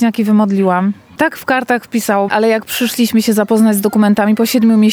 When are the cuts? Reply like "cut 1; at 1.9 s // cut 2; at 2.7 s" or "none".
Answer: cut 1; at 1.2 s // cut 2; at 2.3 s